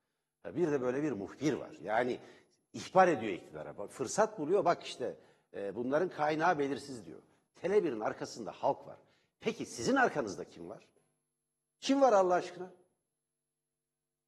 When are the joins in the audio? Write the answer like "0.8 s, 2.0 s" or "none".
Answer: 7.5 s